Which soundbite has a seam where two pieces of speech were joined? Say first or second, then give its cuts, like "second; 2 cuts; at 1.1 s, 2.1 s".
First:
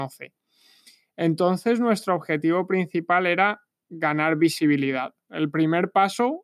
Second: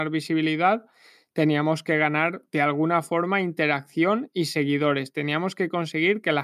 first; 1 cut; at 5.3 s